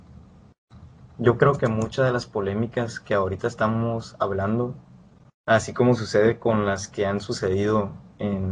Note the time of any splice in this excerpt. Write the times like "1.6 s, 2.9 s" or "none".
none